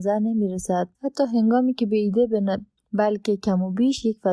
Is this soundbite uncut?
no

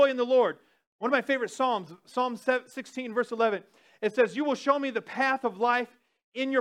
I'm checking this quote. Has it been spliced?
no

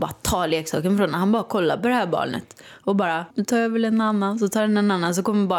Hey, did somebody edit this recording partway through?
yes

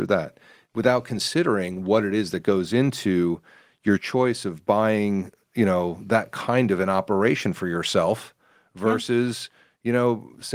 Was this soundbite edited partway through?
no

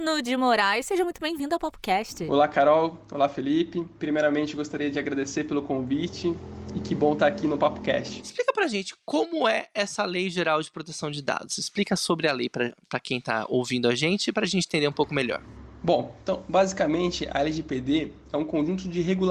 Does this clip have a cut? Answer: no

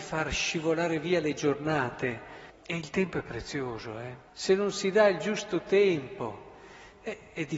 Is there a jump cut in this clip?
yes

